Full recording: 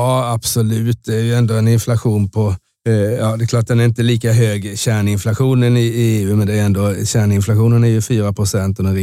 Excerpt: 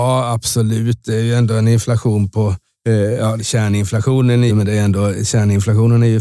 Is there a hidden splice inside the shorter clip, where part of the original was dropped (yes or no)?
yes